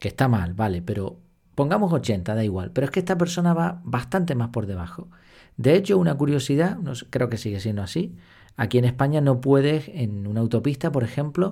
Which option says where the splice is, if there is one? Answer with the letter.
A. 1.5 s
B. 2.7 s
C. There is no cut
A